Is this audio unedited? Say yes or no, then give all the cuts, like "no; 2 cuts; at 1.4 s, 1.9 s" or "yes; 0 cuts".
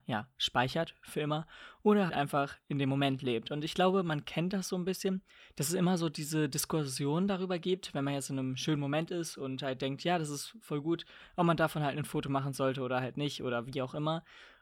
no; 1 cut; at 2.1 s